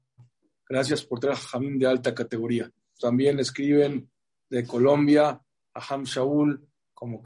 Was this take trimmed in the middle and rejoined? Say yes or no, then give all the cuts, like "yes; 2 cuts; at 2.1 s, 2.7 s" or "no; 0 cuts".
yes; 1 cut; at 3.0 s